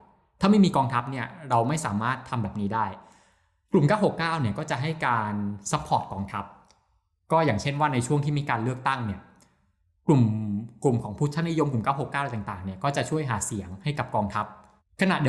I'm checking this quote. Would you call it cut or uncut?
uncut